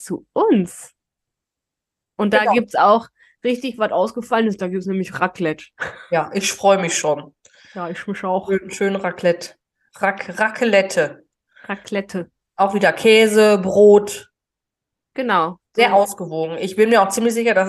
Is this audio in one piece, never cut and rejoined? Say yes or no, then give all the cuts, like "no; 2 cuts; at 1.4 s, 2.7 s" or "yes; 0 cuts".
yes; 0 cuts